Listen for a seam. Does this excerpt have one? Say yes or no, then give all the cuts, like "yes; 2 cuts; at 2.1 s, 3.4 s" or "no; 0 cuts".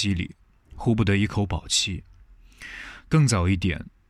no; 0 cuts